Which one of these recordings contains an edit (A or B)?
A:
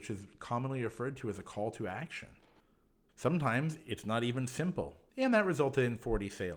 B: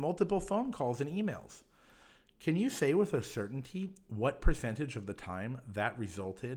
A